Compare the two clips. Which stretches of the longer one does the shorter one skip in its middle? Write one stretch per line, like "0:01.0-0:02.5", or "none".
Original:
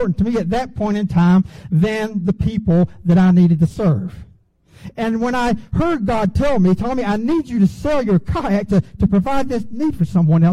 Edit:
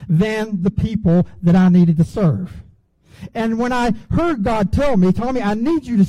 none